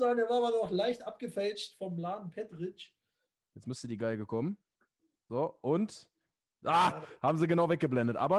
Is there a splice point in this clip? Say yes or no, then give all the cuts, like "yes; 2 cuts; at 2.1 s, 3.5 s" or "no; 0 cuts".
yes; 1 cut; at 3.4 s